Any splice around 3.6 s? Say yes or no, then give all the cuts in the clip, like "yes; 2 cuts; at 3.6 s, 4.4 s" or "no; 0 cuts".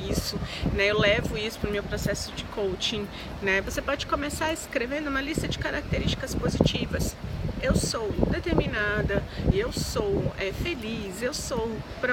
yes; 2 cuts; at 3.6 s, 9.5 s